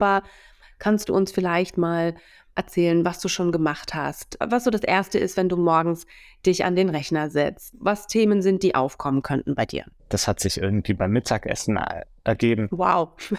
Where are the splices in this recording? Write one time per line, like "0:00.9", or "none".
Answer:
0:10.0